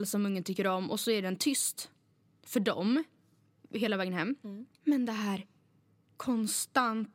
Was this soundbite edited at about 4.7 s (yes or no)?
yes